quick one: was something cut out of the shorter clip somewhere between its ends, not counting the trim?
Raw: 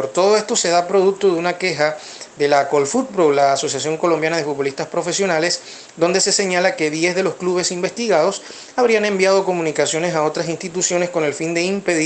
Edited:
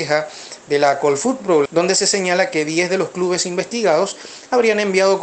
yes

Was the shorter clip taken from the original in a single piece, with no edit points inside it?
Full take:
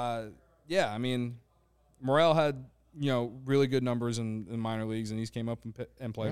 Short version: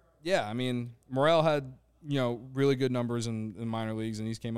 no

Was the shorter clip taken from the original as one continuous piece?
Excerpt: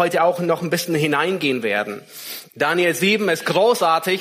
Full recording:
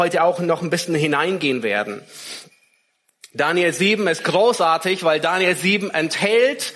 no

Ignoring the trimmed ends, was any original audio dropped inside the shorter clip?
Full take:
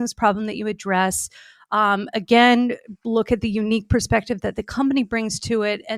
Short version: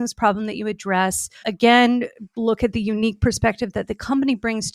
yes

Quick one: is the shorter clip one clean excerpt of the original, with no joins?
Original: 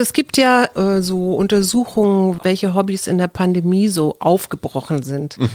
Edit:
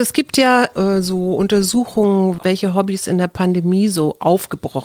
yes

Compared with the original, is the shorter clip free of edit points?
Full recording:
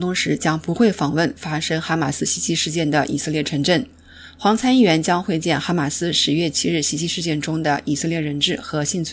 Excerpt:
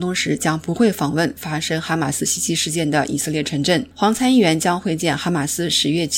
no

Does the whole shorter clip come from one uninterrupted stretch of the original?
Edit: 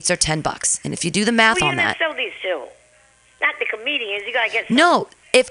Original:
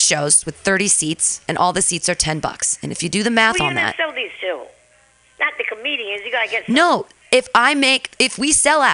yes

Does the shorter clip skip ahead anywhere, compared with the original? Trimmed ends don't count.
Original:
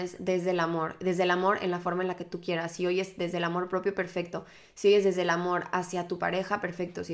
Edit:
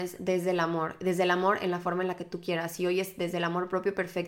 no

